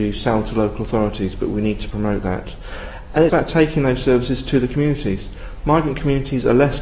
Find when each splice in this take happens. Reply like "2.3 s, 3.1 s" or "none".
3.3 s

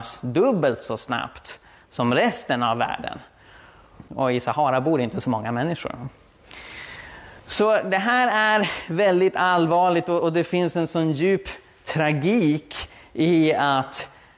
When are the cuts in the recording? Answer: 4.1 s, 7.4 s

